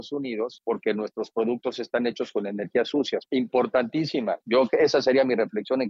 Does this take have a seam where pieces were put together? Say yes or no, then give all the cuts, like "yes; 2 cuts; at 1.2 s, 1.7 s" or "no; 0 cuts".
yes; 2 cuts; at 3.3 s, 4.4 s